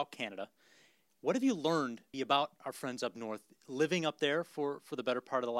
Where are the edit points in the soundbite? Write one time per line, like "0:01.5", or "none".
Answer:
0:02.1